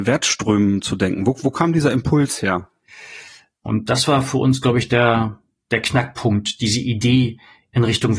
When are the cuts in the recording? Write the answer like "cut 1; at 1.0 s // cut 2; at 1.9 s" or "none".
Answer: cut 1; at 3.7 s